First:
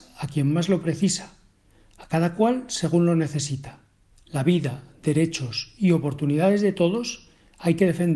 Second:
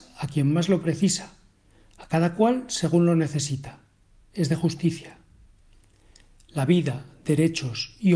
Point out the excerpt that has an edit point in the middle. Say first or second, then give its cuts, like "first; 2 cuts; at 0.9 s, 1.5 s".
first; 1 cut; at 4.1 s